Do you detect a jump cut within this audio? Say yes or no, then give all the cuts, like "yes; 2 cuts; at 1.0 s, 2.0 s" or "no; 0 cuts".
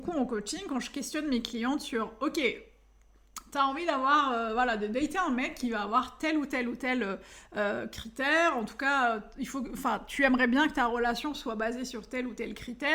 no; 0 cuts